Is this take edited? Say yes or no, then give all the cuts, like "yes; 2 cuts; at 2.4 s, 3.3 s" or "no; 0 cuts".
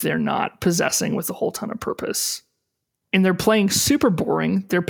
yes; 1 cut; at 3.0 s